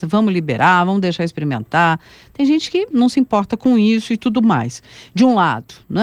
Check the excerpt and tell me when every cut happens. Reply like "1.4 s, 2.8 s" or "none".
2.9 s